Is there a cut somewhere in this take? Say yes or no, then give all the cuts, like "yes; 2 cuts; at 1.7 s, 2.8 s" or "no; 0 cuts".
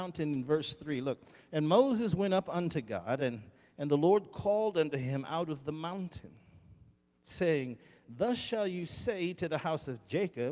no; 0 cuts